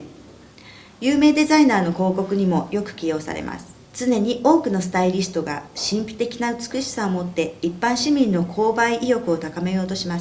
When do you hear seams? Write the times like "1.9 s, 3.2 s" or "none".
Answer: 3.8 s